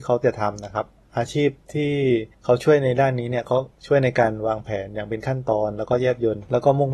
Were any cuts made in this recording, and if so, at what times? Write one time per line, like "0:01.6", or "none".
0:02.3
0:03.7